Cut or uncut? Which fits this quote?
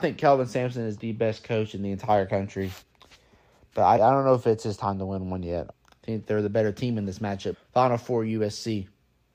cut